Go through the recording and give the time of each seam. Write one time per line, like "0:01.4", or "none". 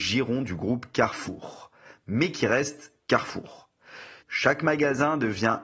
0:04.2